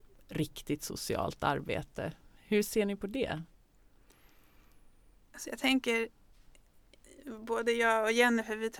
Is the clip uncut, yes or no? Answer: yes